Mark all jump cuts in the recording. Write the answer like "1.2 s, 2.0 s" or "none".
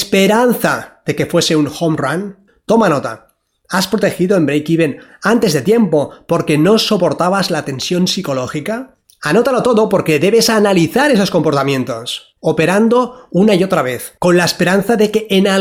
9.0 s, 14.2 s